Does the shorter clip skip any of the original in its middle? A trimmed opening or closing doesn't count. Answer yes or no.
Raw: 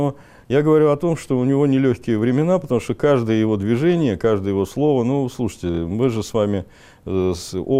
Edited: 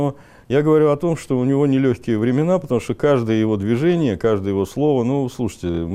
no